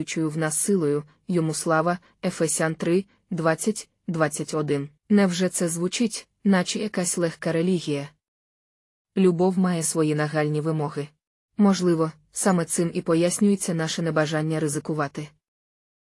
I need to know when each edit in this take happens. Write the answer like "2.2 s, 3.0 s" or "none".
5.0 s, 11.5 s

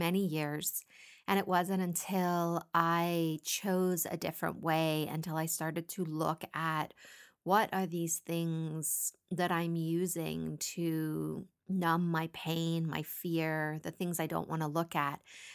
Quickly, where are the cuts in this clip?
none

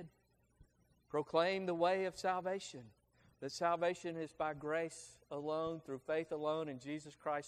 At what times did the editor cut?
none

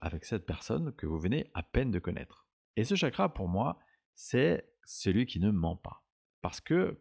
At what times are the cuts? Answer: 2.7 s

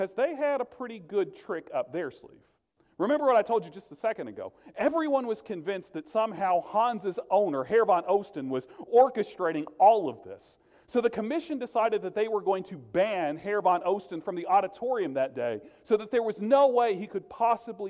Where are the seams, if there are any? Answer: none

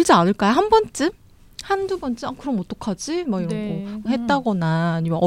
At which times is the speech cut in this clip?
4.1 s

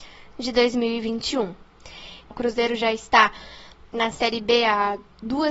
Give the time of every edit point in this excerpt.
2.3 s

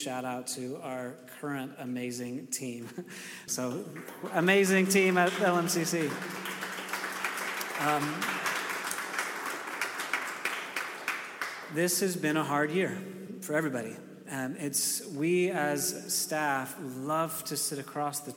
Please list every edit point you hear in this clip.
3.5 s

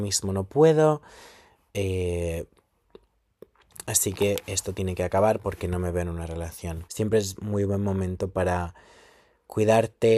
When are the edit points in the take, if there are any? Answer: 6.9 s

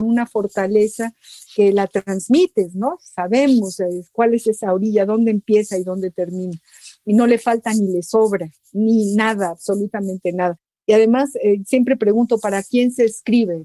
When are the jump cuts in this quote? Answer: none

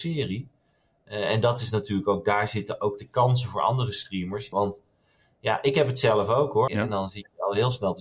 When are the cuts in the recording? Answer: 4.5 s, 6.7 s

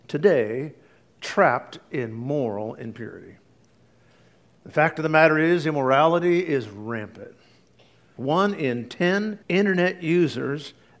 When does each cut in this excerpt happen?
8.2 s, 9.4 s

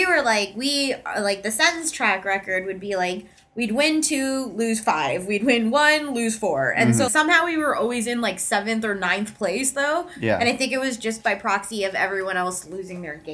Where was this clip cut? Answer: 7.1 s

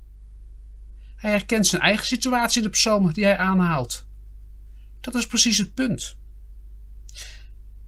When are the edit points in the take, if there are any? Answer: none

